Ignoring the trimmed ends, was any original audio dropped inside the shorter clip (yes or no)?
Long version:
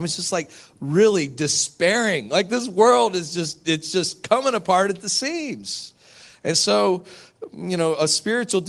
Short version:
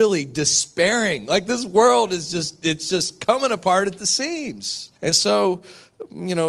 yes